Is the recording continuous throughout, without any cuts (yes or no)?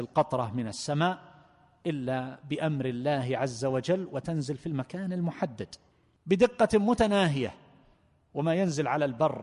yes